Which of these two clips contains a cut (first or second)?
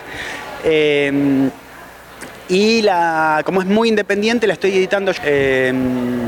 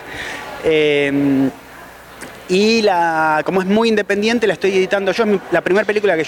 first